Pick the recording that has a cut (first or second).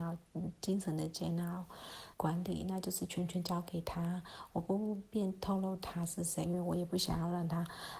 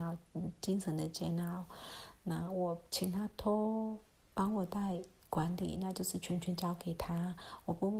first